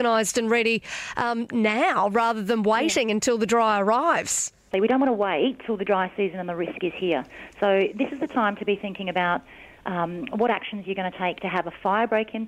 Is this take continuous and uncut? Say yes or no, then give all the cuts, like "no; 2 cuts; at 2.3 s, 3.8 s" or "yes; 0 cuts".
no; 1 cut; at 4.7 s